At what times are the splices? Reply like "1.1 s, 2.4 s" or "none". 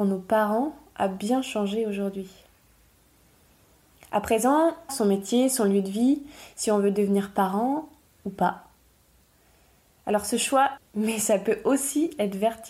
4.9 s, 10.8 s